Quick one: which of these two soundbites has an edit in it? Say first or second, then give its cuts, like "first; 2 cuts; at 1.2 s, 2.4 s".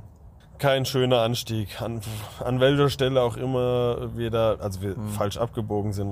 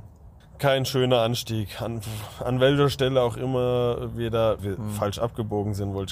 second; 1 cut; at 4.6 s